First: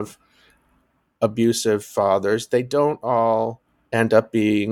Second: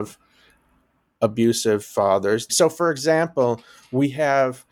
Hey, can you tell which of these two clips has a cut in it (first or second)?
second